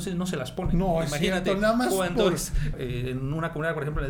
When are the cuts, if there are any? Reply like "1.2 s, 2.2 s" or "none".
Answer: 2.7 s